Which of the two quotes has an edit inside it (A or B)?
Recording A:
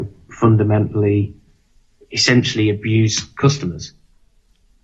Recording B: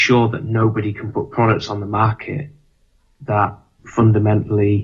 B